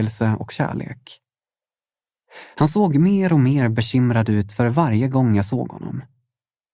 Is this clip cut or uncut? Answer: uncut